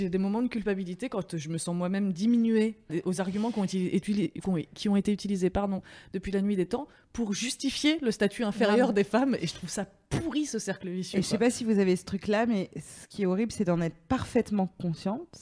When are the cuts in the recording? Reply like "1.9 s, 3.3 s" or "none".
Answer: 2.9 s